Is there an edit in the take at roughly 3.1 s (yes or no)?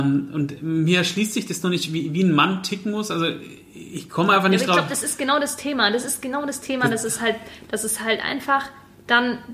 no